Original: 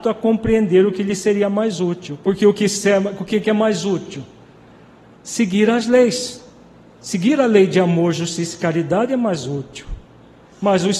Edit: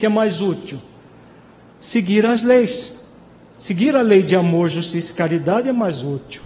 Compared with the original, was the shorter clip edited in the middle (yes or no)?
no